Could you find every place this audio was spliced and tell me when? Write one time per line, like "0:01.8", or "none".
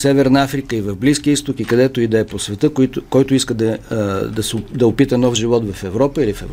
none